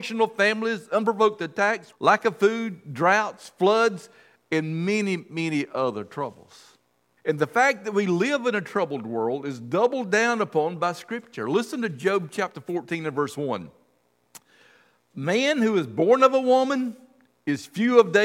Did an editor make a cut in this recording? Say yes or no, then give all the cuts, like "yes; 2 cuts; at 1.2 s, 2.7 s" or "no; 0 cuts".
yes; 2 cuts; at 1.9 s, 7.2 s